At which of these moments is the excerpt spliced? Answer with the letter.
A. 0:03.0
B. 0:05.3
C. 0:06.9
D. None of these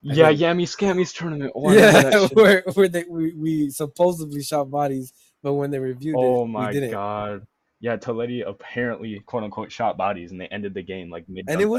D